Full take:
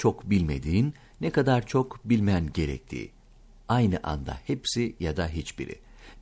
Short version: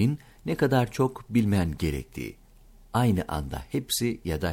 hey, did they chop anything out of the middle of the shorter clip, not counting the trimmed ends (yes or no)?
no